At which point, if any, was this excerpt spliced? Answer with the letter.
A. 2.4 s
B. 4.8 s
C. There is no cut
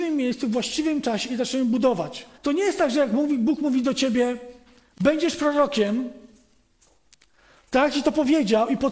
A